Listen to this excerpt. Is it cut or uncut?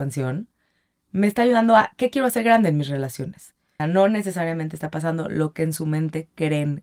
cut